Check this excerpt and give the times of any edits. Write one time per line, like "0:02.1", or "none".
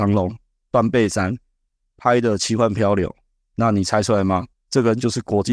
0:04.5